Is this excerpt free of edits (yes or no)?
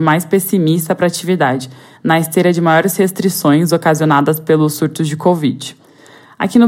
yes